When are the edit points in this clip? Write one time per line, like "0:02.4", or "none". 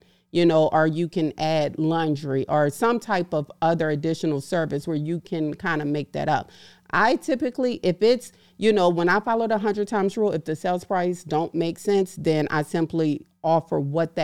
none